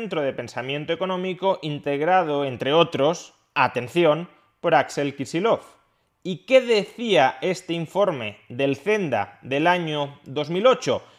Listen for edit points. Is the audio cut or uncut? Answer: uncut